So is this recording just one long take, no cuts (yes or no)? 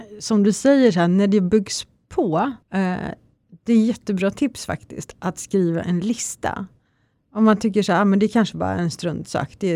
no